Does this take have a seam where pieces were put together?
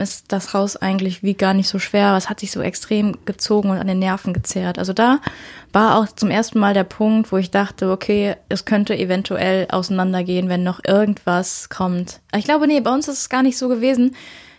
no; 0 cuts

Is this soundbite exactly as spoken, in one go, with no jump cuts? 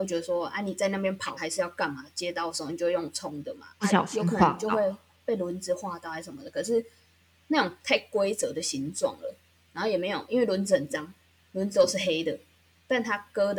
no; 1 cut; at 1.4 s

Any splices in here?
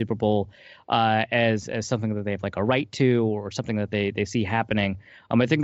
no; 0 cuts

